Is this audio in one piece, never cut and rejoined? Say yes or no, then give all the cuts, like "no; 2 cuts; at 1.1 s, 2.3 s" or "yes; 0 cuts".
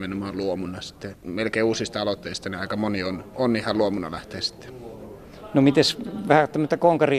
yes; 0 cuts